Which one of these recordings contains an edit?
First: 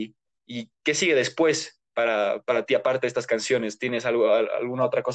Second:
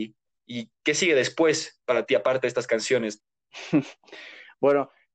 second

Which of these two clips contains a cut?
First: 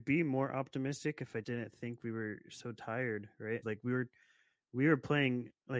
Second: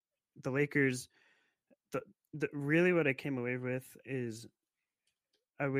first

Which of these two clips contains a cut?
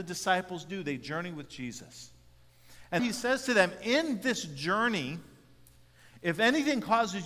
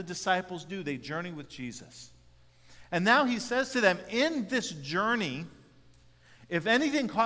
first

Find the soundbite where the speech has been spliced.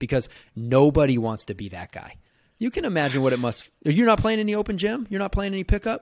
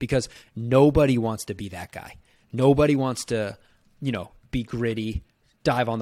first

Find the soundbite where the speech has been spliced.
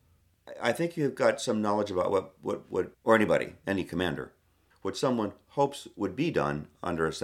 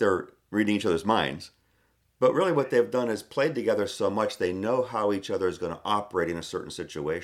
first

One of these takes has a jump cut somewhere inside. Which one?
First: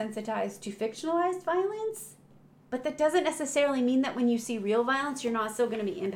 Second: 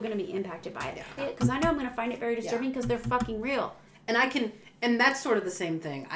second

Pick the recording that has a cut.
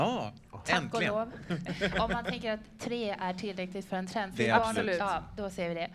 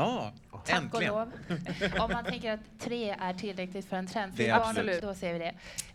second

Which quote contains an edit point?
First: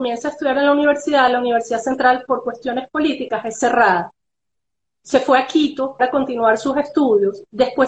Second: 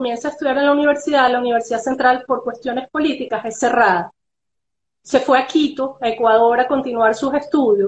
first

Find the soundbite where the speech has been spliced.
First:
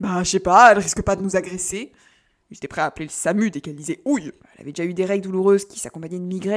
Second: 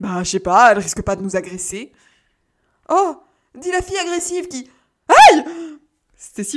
first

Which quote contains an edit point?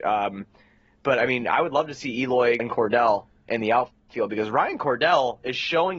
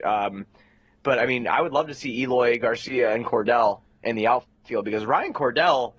first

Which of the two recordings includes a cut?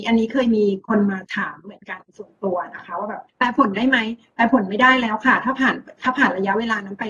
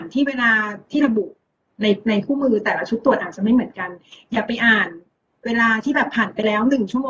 first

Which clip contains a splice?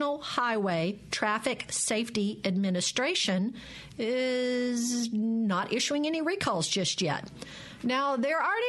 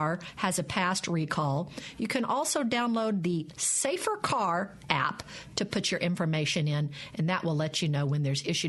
first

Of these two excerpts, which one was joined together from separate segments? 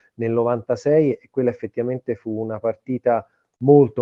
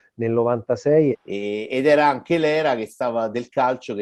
second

